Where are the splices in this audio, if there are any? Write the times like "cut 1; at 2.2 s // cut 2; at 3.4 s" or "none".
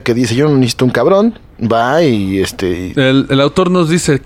cut 1; at 2.9 s